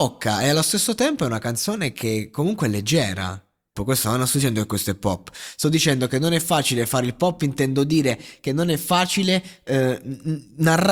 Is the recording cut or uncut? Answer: cut